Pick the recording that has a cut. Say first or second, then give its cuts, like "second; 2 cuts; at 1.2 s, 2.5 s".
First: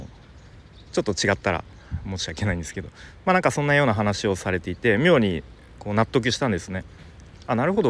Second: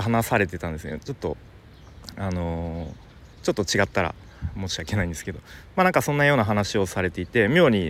second; 1 cut; at 3.3 s